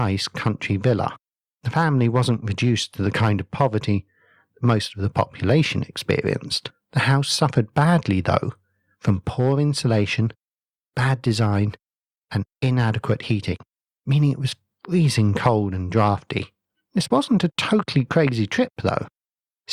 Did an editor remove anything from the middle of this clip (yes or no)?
no